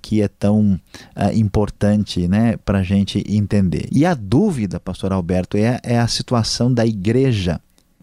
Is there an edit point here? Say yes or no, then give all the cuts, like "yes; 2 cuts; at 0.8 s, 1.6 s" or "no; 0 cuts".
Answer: yes; 2 cuts; at 3.9 s, 5.8 s